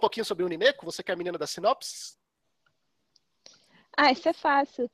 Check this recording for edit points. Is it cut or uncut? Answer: uncut